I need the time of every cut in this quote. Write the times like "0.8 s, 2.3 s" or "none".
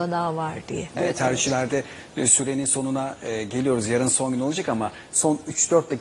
0.9 s

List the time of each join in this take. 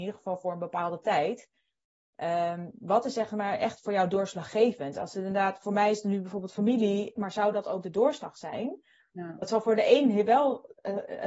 7.2 s

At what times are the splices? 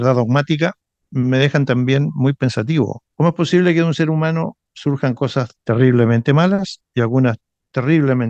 3.1 s, 5.6 s

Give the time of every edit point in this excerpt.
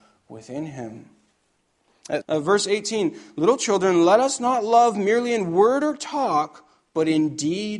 2.2 s

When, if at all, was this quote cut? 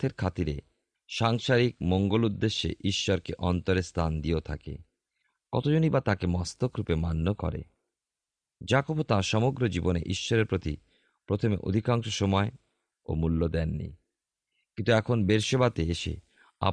none

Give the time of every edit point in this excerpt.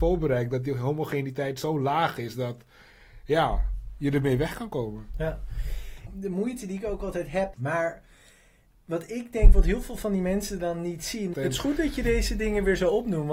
6.1 s, 7.5 s, 11.3 s

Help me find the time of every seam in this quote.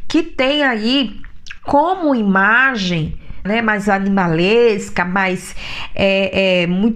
3.5 s

